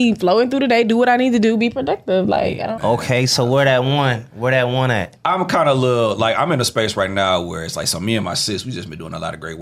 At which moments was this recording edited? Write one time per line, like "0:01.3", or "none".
0:02.8